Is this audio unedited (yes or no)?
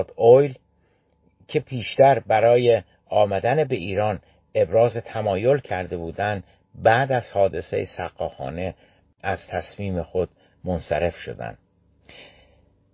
yes